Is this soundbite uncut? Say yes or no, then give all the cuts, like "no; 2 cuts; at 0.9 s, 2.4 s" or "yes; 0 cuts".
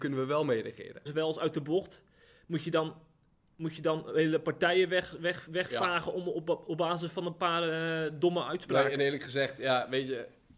no; 1 cut; at 1.1 s